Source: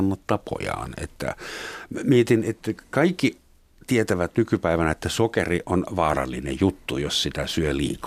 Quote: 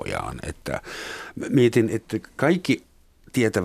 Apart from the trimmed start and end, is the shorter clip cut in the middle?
no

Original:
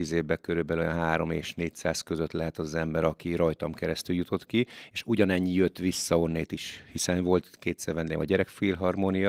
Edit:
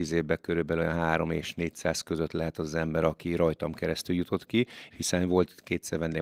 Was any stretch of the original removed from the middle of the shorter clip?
yes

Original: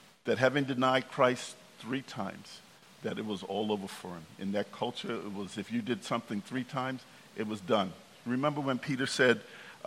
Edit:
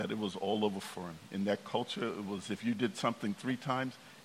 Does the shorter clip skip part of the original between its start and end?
no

